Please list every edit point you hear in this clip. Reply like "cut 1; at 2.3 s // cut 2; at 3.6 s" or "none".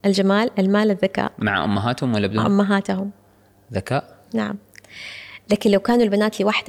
cut 1; at 4.3 s